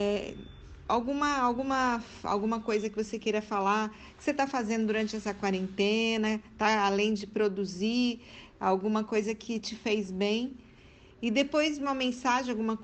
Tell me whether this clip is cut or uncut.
uncut